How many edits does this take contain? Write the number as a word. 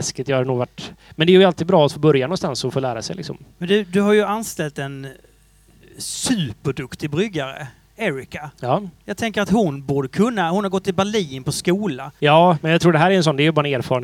two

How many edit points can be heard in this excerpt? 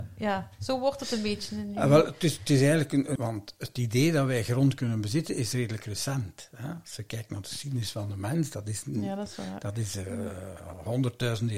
one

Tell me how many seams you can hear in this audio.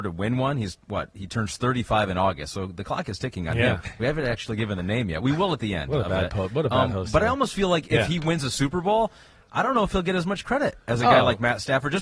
one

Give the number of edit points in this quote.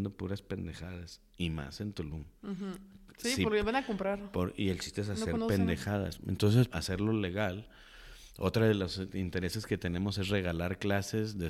one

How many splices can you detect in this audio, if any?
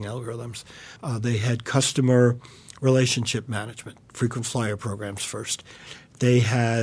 one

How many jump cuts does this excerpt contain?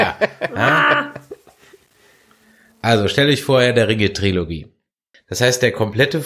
one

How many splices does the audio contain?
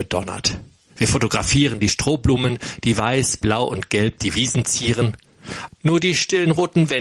one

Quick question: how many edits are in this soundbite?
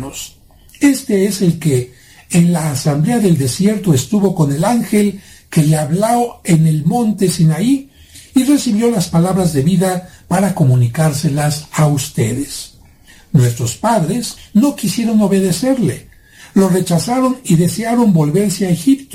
one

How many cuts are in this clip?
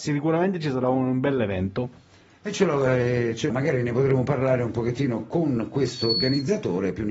one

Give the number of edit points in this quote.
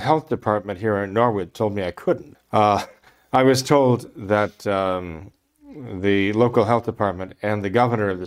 one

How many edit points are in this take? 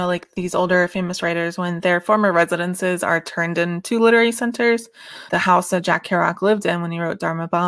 one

